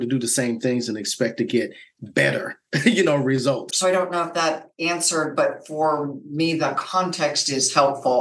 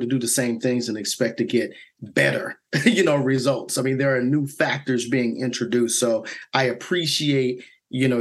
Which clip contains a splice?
first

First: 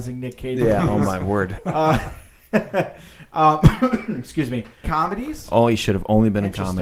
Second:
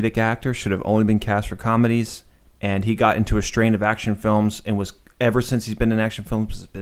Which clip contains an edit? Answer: first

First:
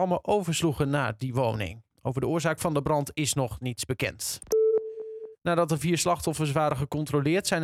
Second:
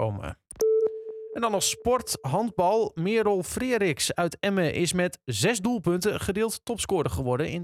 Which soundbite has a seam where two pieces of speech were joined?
first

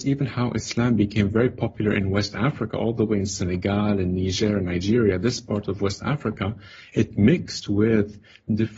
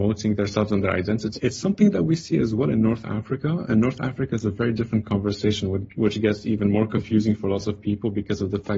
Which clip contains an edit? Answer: second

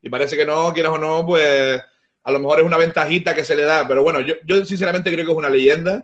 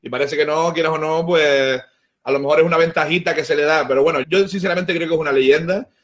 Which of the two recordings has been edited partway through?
second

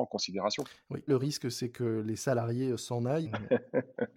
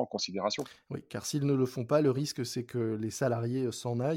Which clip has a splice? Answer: first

